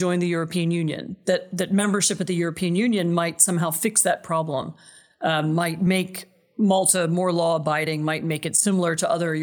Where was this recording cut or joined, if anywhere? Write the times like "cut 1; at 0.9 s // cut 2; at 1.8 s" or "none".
none